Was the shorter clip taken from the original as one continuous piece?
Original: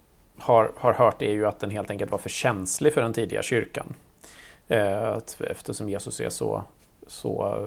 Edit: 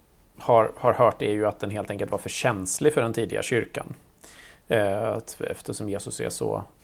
yes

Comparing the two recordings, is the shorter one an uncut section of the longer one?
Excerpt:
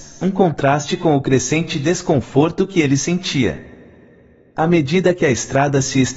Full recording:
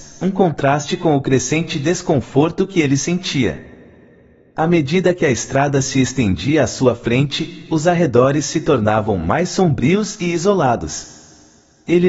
yes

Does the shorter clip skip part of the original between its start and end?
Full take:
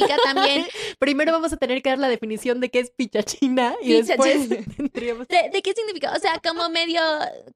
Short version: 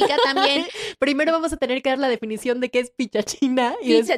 no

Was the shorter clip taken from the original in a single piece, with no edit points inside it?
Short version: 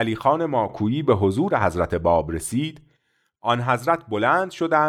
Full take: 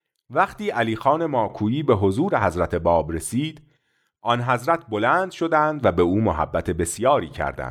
yes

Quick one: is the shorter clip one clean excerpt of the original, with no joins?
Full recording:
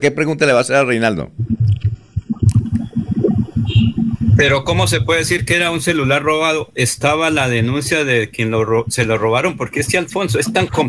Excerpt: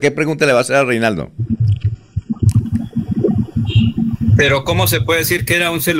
yes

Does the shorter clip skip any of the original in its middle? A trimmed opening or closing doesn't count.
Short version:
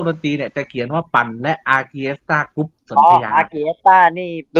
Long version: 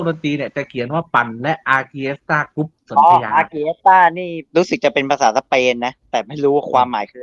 no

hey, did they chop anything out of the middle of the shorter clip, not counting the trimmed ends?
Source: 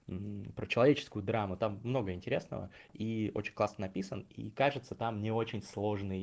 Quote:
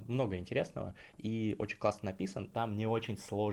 yes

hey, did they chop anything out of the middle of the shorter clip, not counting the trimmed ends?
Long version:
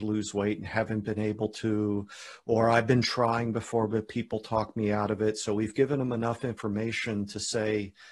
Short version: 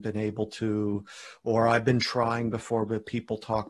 no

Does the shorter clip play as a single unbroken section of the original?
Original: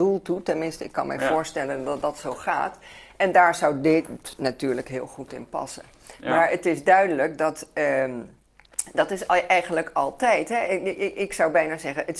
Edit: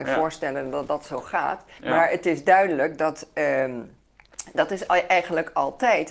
no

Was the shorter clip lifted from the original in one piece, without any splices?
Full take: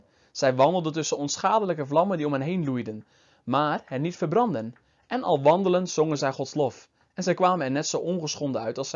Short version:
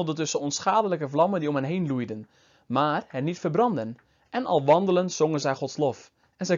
yes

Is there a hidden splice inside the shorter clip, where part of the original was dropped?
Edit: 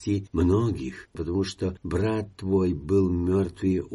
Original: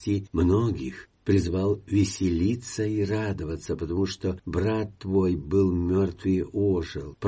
yes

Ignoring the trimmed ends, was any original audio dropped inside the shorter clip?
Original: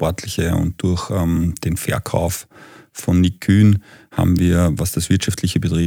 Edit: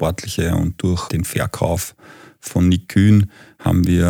yes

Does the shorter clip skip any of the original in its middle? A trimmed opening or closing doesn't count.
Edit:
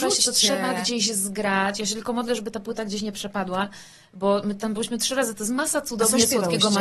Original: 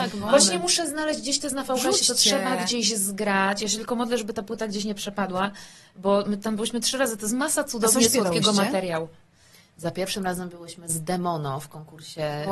no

